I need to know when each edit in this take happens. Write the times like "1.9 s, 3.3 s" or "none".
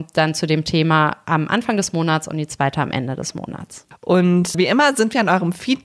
none